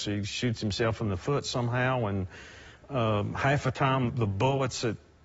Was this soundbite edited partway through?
yes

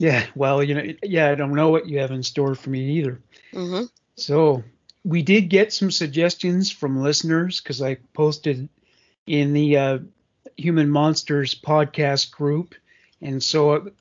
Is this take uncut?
yes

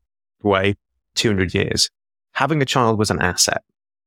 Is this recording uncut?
no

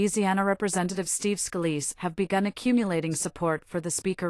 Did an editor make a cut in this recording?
no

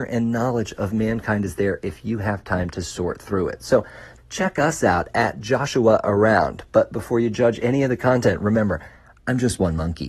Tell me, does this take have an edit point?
yes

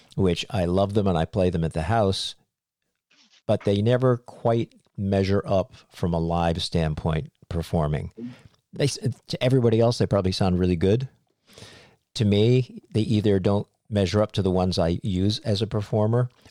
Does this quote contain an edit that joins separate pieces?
no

